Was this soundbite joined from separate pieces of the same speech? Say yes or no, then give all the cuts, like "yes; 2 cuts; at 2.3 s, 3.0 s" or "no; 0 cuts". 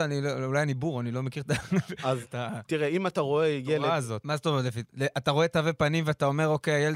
yes; 2 cuts; at 2.2 s, 4.2 s